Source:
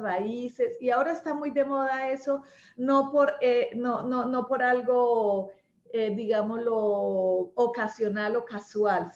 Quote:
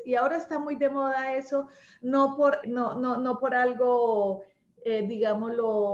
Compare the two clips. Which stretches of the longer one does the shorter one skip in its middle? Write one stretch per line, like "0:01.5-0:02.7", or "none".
0:03.4-0:03.7